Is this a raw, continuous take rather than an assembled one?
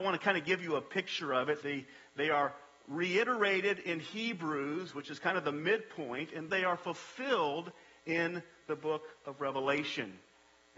no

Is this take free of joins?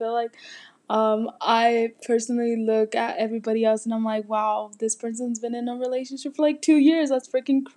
yes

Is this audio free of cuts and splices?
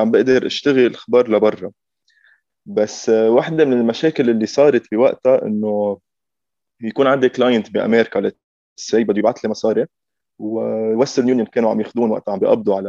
yes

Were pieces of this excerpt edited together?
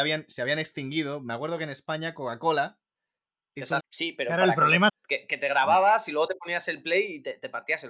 yes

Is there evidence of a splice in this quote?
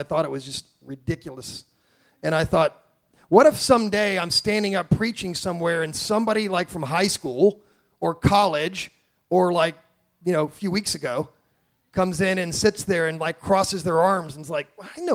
no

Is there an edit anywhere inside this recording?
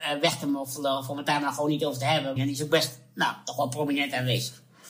yes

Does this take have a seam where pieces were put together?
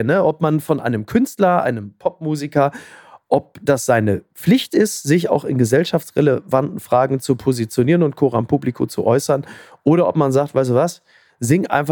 no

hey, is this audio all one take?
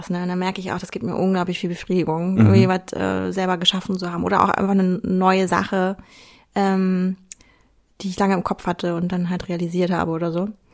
yes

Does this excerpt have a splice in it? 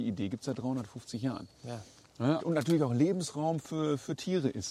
yes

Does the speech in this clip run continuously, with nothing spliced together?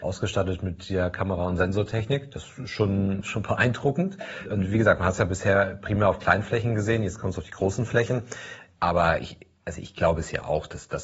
no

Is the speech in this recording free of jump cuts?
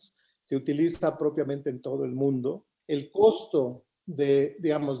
no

